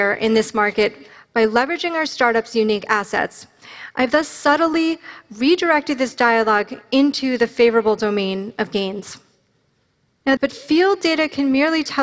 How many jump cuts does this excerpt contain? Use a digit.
1